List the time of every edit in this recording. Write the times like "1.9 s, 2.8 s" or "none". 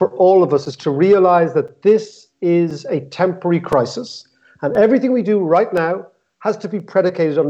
none